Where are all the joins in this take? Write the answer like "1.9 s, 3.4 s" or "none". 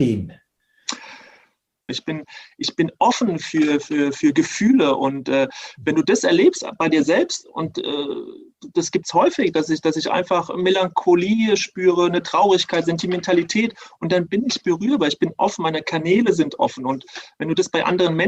1.9 s